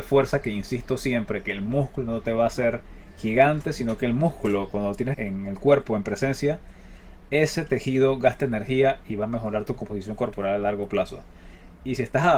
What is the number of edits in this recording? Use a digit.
1